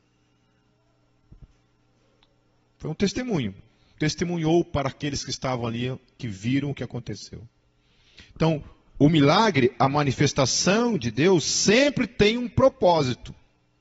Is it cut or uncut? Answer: uncut